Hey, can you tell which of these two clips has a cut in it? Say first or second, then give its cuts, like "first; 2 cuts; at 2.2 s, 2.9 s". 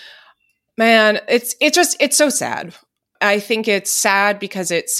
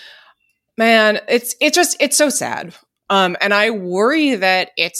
second; 1 cut; at 3.1 s